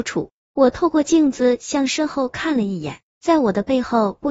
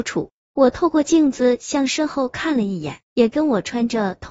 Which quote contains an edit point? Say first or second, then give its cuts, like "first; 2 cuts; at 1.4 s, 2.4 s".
second; 1 cut; at 3.0 s